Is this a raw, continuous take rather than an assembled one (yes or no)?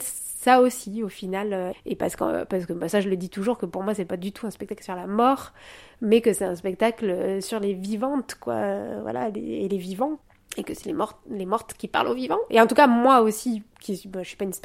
no